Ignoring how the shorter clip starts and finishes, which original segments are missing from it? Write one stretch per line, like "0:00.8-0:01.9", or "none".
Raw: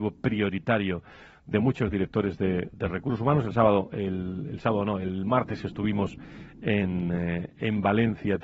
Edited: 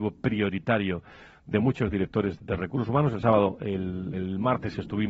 0:02.4-0:02.7
0:04.4-0:05.0